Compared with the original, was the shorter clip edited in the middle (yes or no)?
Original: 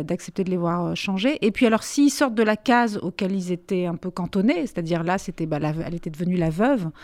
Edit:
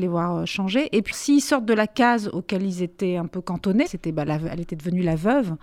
yes